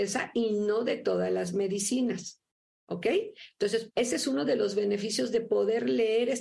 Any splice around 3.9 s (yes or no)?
yes